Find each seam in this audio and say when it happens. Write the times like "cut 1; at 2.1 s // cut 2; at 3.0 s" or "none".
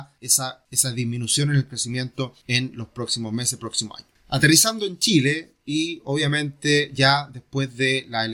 none

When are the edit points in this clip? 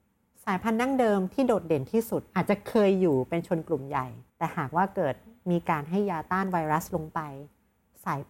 cut 1; at 4.3 s

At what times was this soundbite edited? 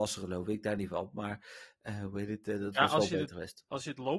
none

